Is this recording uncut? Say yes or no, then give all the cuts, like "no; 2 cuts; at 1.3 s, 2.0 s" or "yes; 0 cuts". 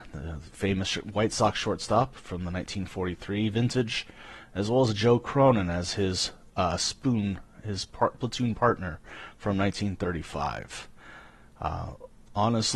yes; 0 cuts